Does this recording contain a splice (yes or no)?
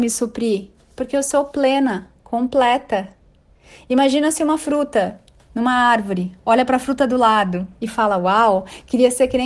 no